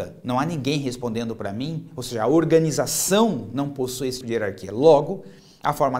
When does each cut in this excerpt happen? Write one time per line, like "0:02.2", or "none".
0:04.2